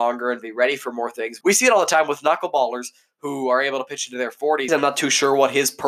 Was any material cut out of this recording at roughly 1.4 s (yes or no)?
yes